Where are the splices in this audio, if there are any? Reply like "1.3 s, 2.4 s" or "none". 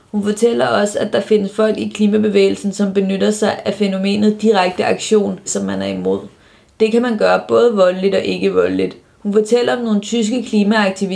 5.5 s